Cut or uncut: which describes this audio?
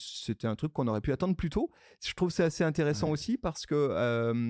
uncut